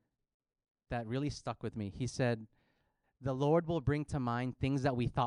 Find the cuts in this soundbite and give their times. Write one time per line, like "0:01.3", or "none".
0:03.0